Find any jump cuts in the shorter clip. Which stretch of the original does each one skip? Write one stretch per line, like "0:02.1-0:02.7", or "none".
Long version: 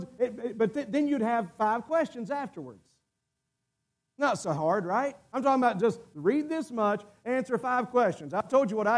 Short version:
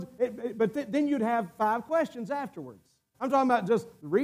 0:03.1-0:05.3